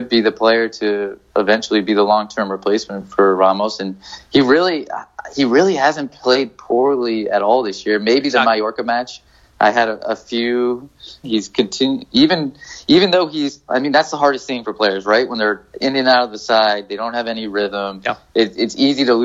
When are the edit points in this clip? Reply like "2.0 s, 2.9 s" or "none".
11.2 s